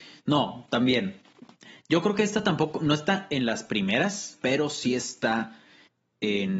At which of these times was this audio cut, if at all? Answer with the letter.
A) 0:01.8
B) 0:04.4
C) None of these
B